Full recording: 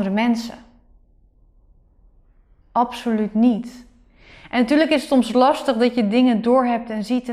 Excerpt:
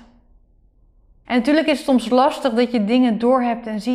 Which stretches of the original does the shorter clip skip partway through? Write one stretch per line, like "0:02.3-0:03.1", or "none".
0:01.8-0:04.5